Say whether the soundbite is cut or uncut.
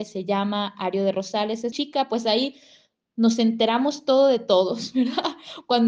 cut